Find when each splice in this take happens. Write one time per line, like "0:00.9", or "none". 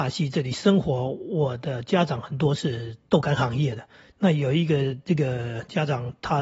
none